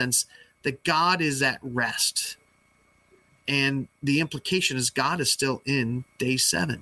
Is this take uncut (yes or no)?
yes